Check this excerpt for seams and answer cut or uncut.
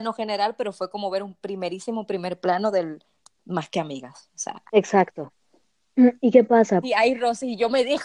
cut